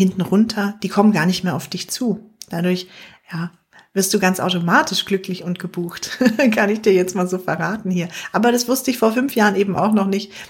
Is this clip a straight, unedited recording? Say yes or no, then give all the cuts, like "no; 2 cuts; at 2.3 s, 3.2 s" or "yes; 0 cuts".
yes; 0 cuts